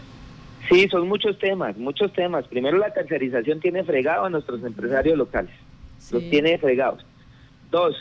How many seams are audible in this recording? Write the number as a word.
zero